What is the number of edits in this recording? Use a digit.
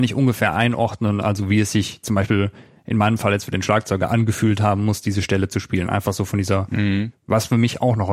1